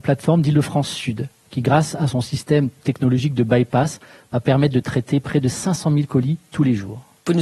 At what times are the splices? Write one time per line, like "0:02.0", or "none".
none